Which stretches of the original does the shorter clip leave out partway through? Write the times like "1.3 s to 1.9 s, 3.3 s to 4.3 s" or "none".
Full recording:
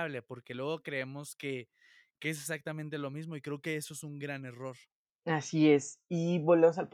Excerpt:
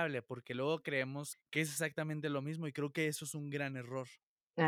1.3 s to 2.0 s